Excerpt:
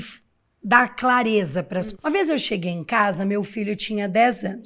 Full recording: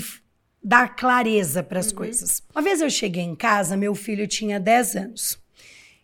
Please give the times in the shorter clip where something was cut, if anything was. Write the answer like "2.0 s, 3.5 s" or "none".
1.9 s